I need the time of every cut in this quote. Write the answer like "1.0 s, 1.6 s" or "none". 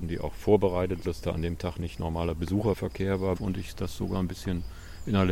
1.0 s, 3.4 s